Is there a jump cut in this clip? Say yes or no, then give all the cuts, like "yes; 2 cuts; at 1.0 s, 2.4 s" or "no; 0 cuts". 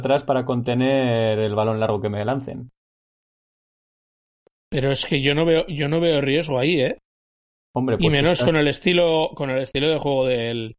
no; 0 cuts